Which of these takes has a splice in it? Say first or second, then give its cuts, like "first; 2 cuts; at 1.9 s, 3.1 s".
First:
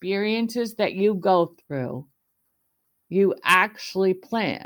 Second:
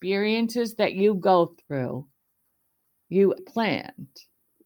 second; 1 cut; at 3.4 s